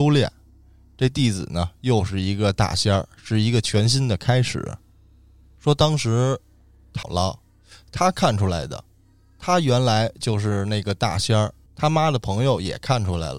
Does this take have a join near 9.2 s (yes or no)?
no